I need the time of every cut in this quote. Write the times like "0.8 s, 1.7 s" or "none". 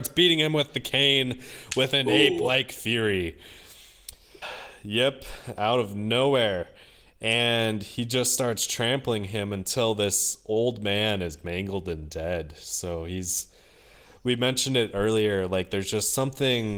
4.4 s